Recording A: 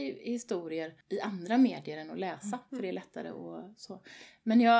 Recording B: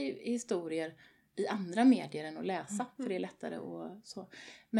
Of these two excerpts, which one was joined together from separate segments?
A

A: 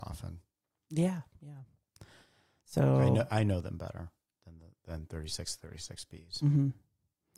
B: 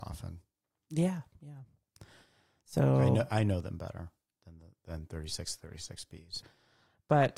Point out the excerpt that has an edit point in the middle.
B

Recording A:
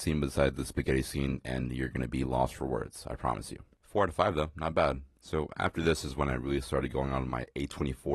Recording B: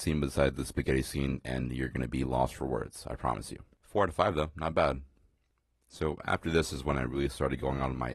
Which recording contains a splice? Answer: A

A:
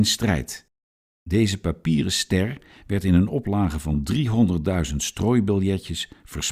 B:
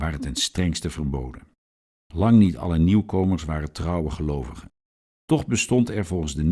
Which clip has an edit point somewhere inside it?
B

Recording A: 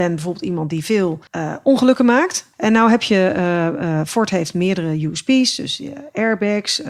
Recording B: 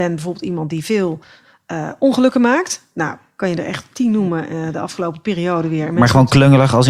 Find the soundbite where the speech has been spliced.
A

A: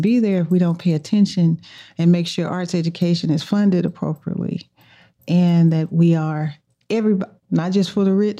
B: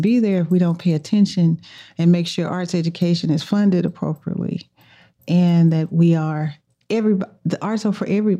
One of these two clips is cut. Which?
A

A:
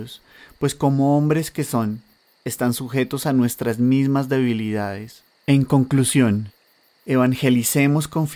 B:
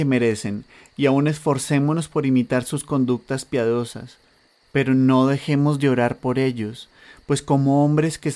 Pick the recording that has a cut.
A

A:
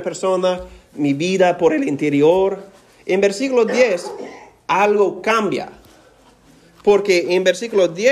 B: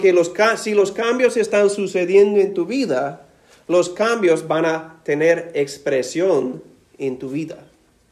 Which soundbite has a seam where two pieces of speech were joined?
A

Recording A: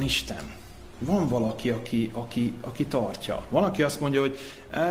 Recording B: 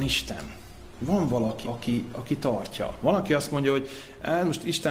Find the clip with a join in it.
B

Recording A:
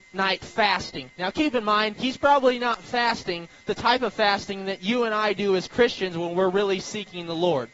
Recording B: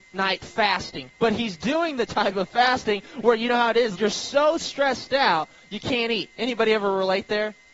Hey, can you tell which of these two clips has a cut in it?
B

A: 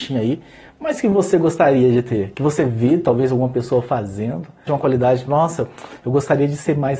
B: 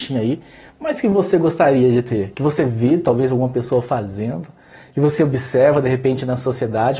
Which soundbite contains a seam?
A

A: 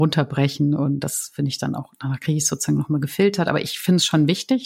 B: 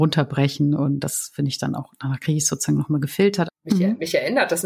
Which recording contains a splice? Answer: B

